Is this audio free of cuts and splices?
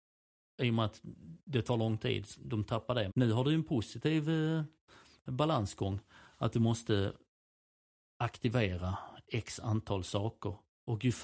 no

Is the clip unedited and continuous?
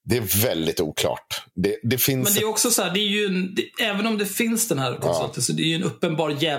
yes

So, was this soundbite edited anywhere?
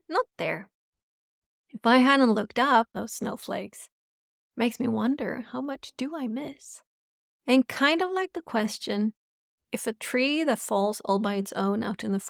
yes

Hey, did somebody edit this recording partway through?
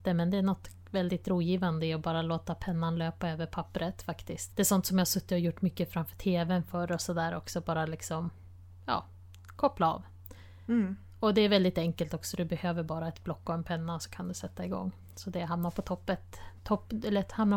yes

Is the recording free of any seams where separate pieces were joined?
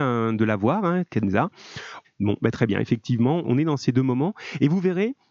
no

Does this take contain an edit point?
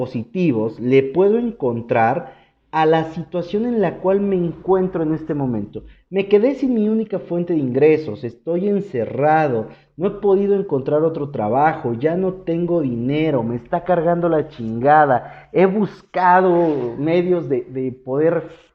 no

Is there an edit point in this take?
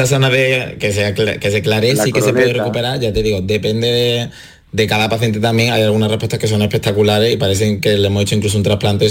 no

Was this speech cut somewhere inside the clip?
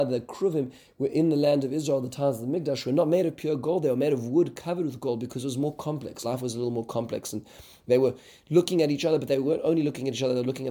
no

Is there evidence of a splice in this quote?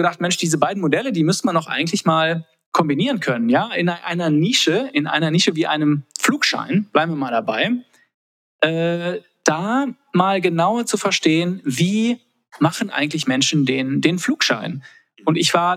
no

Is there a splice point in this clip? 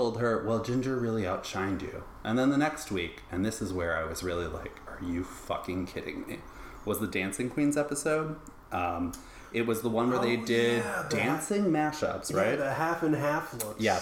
no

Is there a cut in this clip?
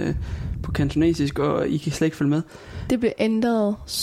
yes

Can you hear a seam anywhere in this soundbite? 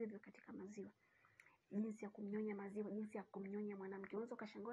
yes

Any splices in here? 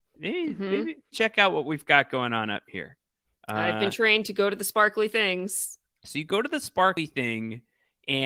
yes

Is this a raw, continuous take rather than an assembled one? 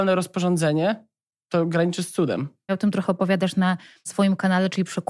no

